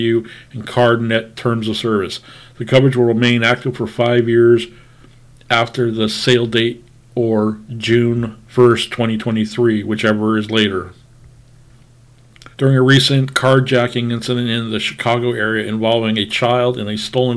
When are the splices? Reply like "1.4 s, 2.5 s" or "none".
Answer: 8.4 s, 12.5 s